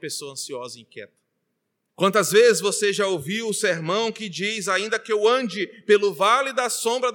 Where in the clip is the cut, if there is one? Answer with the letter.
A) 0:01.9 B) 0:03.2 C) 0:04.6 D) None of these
A